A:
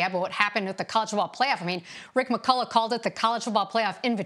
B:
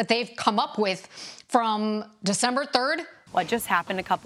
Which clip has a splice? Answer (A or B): B